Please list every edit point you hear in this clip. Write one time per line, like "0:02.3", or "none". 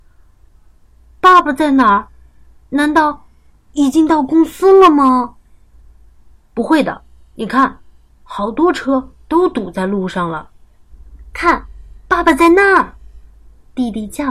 none